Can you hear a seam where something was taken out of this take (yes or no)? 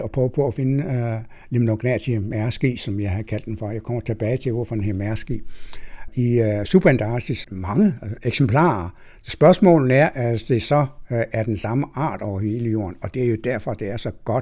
yes